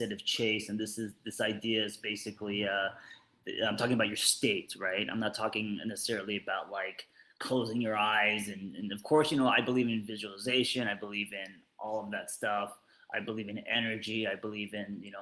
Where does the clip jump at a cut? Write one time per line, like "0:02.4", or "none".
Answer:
none